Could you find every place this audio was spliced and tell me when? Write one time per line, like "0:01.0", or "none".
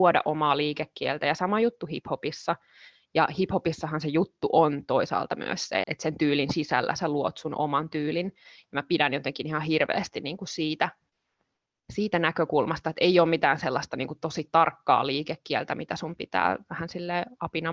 0:05.8